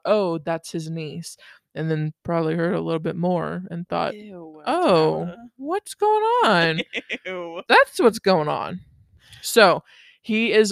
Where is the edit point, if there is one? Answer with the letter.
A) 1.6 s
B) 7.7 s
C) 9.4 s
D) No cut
B